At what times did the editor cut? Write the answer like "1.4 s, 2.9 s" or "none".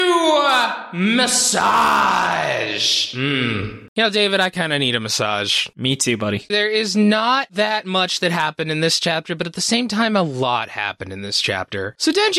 6.5 s